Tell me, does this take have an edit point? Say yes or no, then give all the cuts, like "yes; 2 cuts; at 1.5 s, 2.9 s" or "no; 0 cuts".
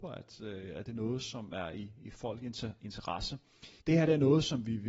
yes; 1 cut; at 3.8 s